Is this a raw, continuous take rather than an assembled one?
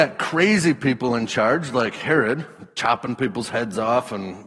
yes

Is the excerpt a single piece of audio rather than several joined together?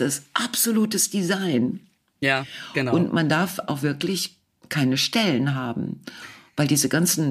yes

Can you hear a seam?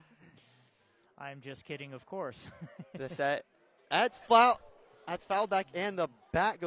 no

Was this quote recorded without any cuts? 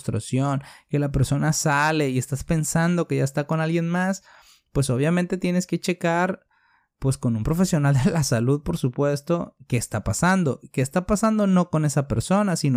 yes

